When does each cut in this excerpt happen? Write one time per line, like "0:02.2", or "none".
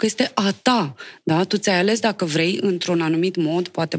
none